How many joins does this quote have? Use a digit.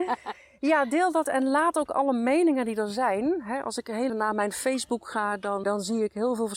2